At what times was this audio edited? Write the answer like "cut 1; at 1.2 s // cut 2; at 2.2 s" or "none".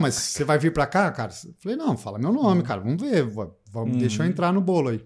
none